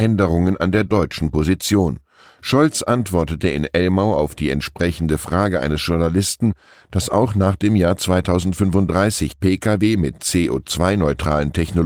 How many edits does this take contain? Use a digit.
0